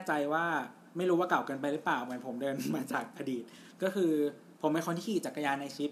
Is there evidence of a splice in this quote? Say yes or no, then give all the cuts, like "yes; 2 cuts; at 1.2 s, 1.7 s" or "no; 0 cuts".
yes; 1 cut; at 0.9 s